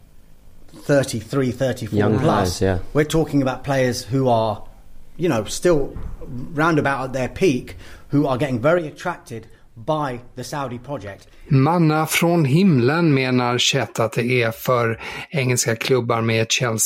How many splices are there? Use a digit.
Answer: 0